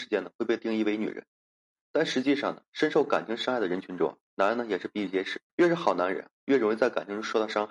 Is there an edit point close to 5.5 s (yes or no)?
yes